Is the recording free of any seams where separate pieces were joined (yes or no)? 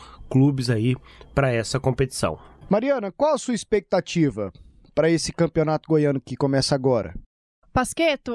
yes